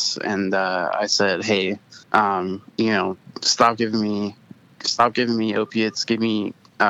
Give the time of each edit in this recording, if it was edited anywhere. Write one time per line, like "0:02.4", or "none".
0:02.0